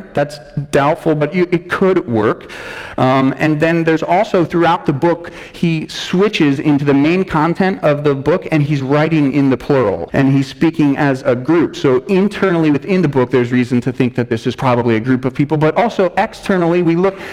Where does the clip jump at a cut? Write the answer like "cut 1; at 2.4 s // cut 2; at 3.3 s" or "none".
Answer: cut 1; at 10.1 s